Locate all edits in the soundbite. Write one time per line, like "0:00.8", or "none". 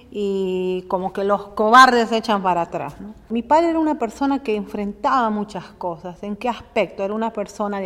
none